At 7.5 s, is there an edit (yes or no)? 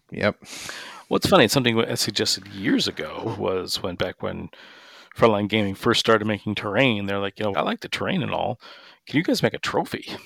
yes